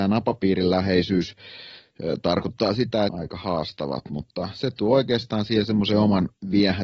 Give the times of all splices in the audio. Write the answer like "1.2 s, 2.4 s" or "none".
3.1 s